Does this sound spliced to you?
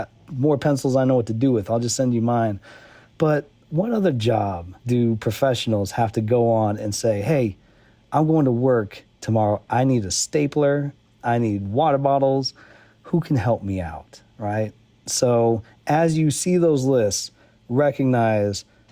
yes; 2 cuts; at 4.8 s, 11.1 s

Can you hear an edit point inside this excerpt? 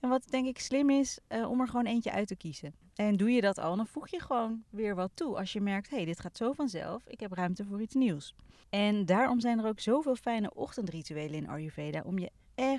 yes; 2 cuts; at 2.8 s, 8.6 s

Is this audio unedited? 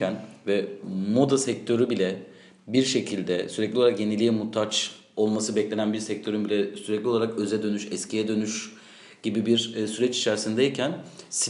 yes; 0 cuts

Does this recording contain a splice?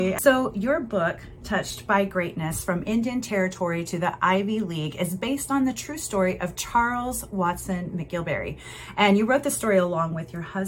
no; 0 cuts

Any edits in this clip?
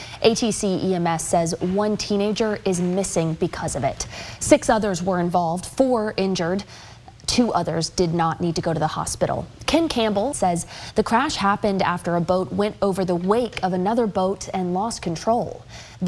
yes; 1 cut; at 10.3 s

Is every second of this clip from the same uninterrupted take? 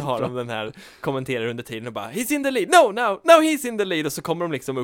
yes; 0 cuts

